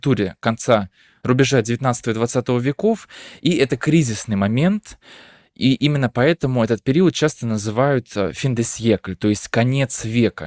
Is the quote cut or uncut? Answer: uncut